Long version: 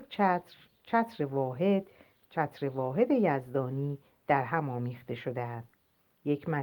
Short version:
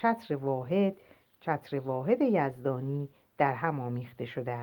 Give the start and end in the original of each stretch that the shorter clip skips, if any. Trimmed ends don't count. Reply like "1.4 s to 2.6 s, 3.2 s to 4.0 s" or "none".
none